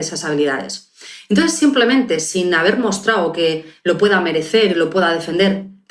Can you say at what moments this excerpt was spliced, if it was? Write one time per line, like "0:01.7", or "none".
none